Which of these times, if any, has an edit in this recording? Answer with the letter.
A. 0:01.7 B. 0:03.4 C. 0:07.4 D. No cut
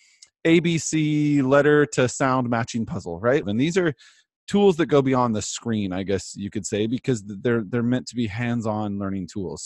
B